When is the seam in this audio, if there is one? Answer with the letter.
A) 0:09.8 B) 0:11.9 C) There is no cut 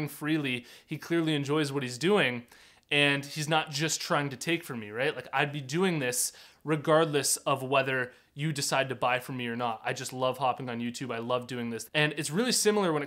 B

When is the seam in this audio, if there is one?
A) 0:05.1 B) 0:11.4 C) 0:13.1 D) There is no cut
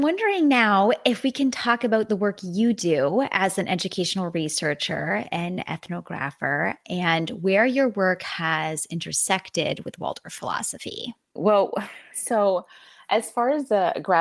B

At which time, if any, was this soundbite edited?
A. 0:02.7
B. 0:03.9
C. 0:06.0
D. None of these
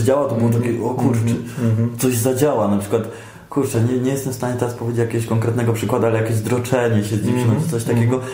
D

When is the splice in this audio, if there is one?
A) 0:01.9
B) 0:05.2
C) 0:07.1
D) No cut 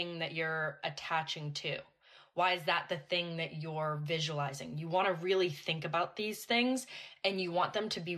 D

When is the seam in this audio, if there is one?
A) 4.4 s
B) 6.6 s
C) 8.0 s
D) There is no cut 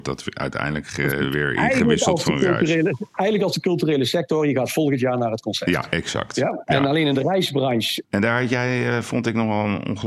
C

